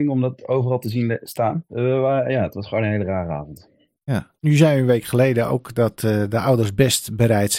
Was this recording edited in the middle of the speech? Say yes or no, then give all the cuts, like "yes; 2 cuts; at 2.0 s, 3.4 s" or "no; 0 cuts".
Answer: yes; 2 cuts; at 1.7 s, 4.4 s